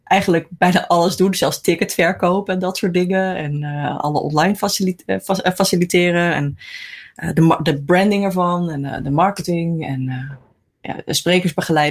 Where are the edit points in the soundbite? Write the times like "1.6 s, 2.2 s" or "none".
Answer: none